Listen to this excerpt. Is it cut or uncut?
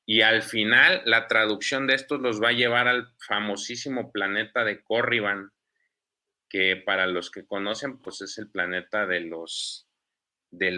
uncut